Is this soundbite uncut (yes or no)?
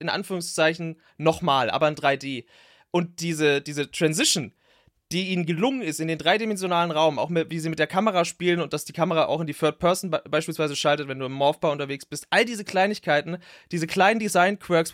yes